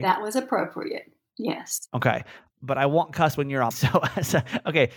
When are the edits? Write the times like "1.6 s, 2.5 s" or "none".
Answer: 2.5 s, 3.7 s